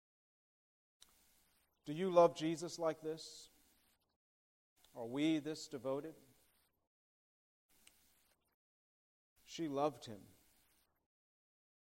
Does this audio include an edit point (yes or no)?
no